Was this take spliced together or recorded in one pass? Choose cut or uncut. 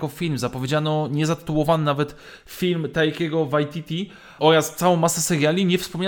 cut